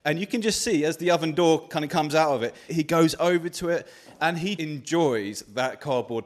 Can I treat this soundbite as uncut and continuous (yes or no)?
no